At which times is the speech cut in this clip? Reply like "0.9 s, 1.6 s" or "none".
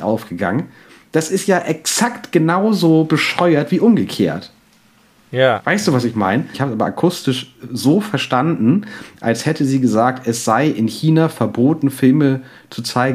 6.5 s